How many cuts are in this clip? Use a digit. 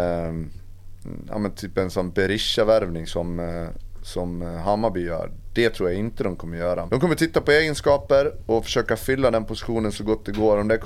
1